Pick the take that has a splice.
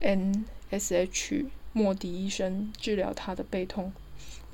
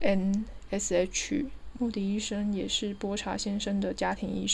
second; 1 cut; at 1.7 s

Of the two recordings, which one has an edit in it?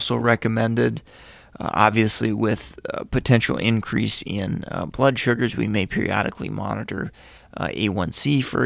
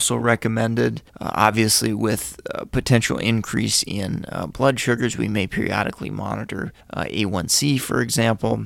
second; 2 cuts; at 1.1 s, 6.8 s

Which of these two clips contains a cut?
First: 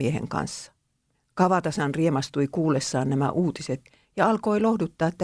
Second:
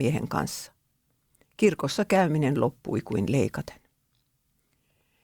first; 1 cut; at 1.1 s

